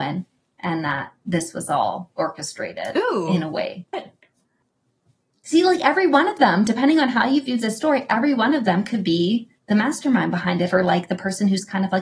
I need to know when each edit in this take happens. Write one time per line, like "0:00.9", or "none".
0:03.9
0:09.6